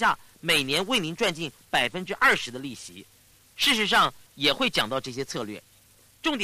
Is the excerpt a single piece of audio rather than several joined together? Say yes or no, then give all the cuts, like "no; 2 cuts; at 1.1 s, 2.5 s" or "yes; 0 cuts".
no; 1 cut; at 4.3 s